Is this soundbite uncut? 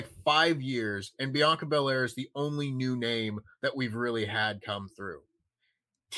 yes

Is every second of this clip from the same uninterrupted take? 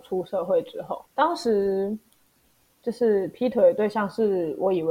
no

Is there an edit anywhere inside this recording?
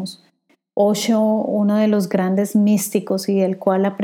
no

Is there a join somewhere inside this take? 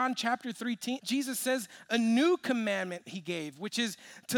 yes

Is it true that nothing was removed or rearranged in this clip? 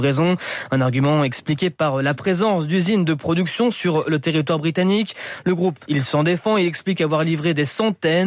no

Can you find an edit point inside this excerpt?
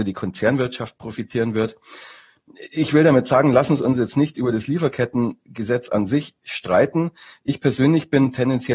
no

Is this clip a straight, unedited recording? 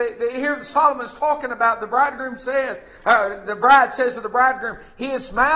yes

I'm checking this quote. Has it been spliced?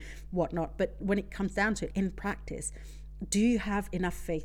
yes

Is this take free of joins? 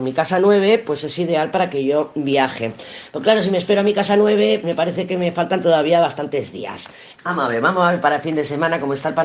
no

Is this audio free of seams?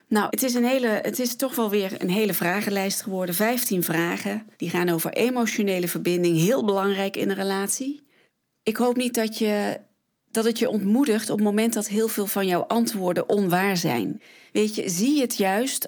yes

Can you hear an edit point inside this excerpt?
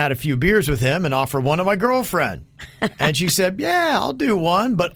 no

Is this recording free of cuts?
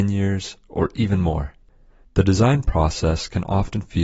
yes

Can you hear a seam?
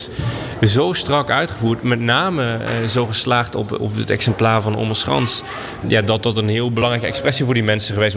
no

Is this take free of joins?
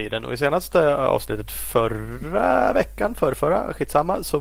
yes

